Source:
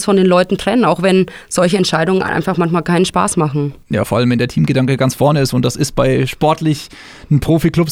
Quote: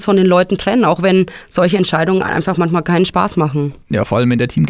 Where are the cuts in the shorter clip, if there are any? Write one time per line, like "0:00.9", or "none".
none